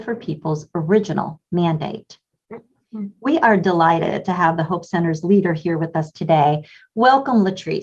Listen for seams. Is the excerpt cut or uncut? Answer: uncut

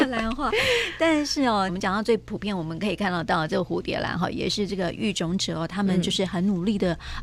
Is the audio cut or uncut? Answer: cut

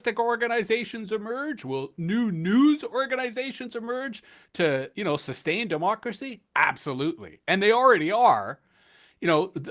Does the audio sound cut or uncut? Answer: uncut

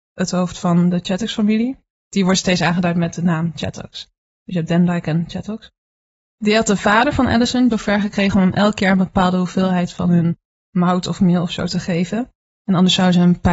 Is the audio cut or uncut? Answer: cut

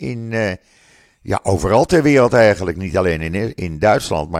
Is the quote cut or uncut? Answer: uncut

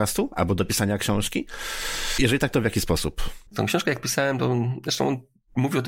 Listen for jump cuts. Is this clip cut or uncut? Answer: cut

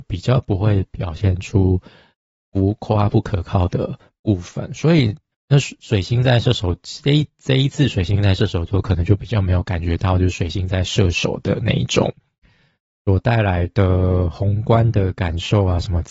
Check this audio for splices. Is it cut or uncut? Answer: cut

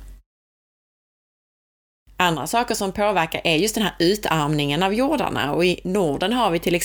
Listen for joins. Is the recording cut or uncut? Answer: uncut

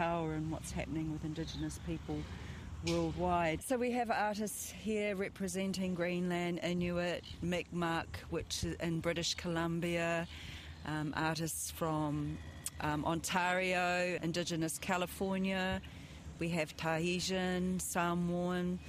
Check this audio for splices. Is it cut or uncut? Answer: cut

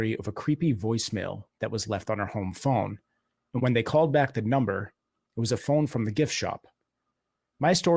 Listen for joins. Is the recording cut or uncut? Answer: cut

